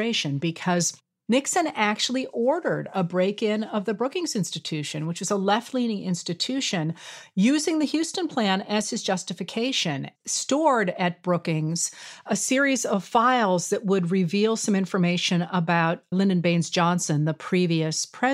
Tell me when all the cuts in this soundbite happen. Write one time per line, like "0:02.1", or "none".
0:10.2
0:16.1